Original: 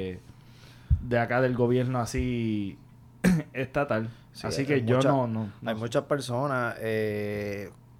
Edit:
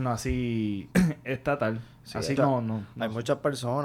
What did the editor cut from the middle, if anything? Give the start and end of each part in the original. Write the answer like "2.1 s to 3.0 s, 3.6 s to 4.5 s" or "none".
2.8 s to 3.2 s, 4.7 s to 5.0 s